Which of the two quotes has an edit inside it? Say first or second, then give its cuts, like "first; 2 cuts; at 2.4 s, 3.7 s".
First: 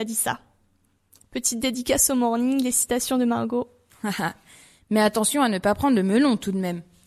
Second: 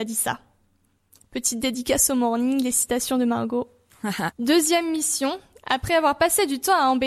second; 1 cut; at 4.3 s